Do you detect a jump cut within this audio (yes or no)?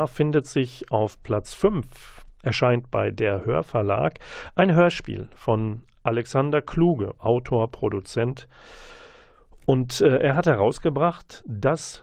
no